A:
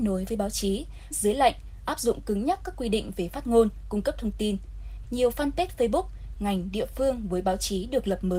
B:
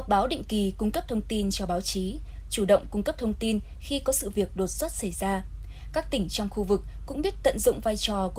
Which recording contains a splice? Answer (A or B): A